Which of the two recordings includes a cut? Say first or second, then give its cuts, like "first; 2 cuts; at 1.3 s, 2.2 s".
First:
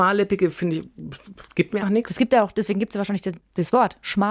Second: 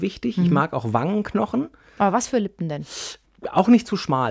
first; 1 cut; at 1.8 s